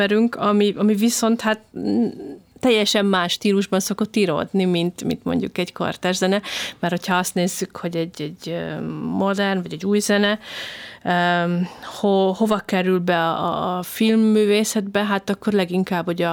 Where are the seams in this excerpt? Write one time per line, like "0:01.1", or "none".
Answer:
none

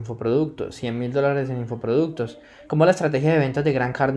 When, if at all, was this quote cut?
0:02.7

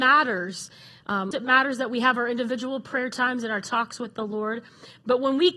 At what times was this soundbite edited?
0:01.3

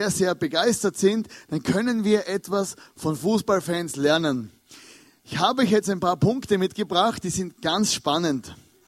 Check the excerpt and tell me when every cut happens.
none

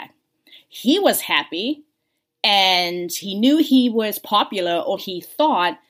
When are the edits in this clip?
0:05.0

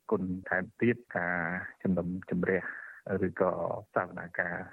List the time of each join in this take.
none

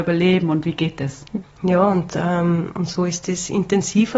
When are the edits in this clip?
0:01.4

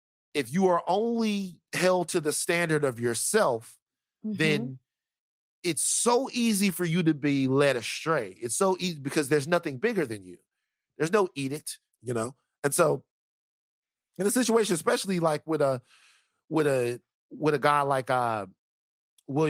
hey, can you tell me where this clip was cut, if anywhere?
0:11.9

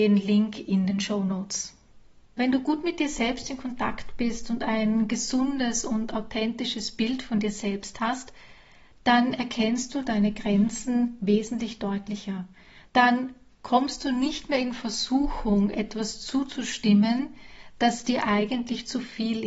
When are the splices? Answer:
0:12.9

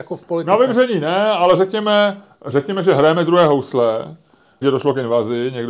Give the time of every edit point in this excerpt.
0:04.6

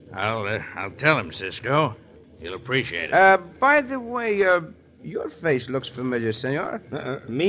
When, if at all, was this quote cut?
none

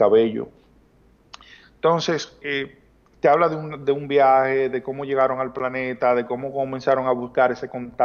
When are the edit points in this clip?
0:02.4

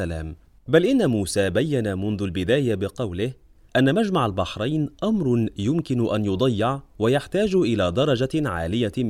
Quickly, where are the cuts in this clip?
0:03.7

